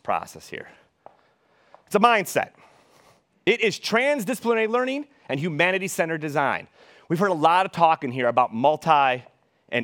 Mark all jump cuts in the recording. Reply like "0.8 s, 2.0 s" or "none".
none